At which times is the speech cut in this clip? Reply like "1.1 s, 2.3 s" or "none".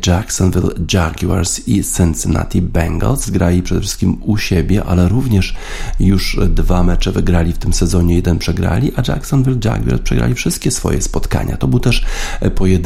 3.2 s